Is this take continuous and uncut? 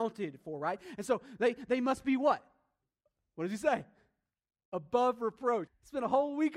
no; 1 cut; at 5.7 s

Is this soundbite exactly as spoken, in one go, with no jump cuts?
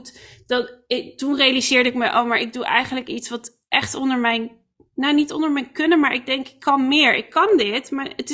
yes; 0 cuts

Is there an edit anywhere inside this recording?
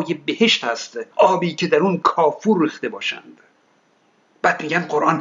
yes; 1 cut; at 1.1 s

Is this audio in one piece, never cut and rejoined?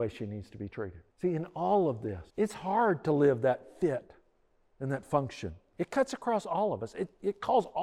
no; 2 cuts; at 1.1 s, 2.3 s

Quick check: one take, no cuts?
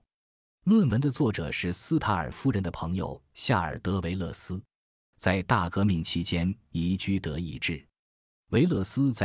no; 1 cut; at 5.1 s

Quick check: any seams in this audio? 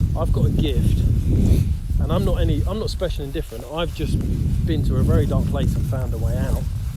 no; 0 cuts

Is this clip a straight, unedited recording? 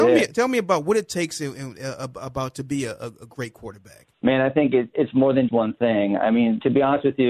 no; 2 cuts; at 4.1 s, 5.5 s

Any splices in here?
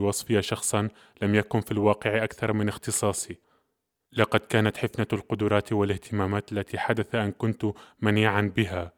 yes; 1 cut; at 4.0 s

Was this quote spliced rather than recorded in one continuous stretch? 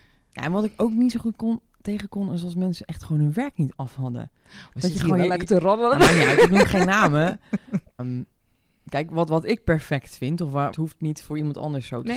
yes; 2 cuts; at 8.0 s, 10.7 s

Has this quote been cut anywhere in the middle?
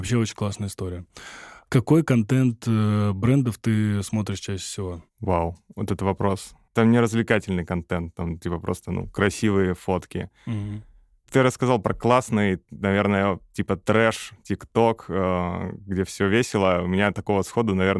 yes; 1 cut; at 6.7 s

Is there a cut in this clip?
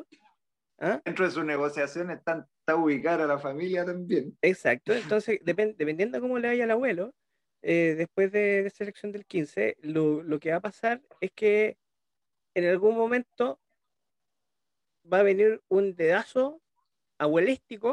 yes; 1 cut; at 1.1 s

